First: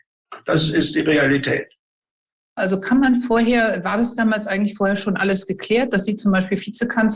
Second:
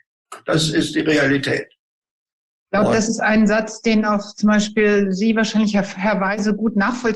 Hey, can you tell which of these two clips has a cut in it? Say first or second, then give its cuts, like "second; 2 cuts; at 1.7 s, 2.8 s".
first; 1 cut; at 2.6 s